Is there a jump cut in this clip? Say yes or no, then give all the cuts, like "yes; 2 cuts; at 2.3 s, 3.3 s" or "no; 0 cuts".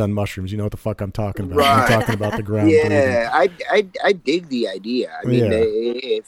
no; 0 cuts